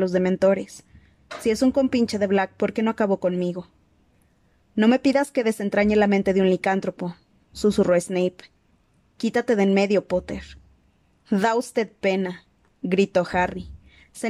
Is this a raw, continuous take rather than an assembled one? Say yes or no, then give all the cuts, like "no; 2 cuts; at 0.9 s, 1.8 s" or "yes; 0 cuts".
yes; 0 cuts